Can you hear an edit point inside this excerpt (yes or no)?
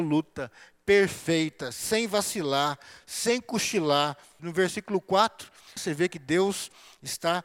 yes